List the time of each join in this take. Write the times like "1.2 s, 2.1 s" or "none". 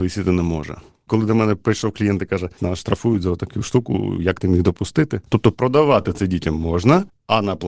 2.6 s, 5.3 s